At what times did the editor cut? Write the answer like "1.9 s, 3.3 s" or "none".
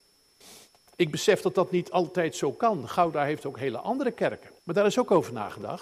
4.6 s